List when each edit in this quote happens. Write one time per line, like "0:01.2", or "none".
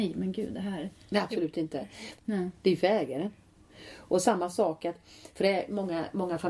0:02.2